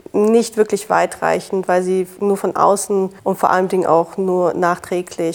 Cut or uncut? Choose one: cut